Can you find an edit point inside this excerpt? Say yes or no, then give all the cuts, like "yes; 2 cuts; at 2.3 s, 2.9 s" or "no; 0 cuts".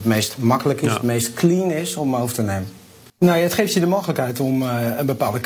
yes; 1 cut; at 3.1 s